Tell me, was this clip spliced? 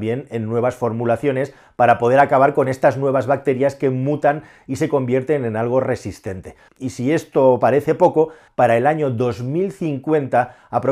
yes; 2 cuts; at 6.7 s, 8.5 s

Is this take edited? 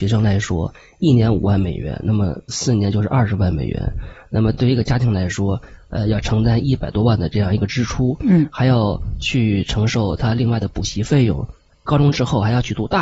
no; 0 cuts

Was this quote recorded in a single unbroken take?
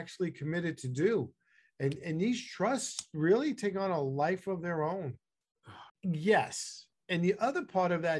no; 1 cut; at 5.9 s

